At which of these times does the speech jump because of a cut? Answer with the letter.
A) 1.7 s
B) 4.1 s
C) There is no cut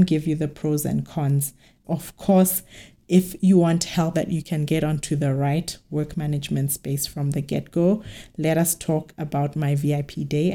B